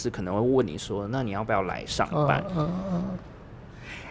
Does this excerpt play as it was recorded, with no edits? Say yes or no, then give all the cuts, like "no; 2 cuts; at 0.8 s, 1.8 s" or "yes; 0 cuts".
no; 1 cut; at 2.5 s